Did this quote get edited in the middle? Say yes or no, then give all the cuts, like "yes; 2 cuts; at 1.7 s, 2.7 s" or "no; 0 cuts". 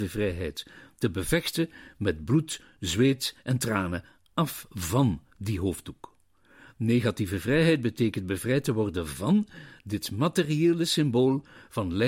no; 0 cuts